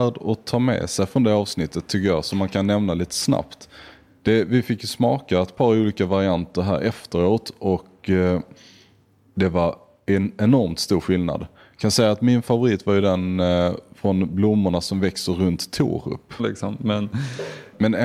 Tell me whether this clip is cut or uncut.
cut